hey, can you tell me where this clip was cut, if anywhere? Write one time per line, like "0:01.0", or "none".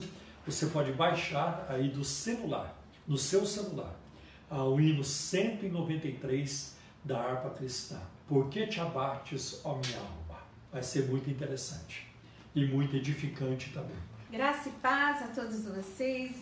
0:08.2
0:10.7
0:14.3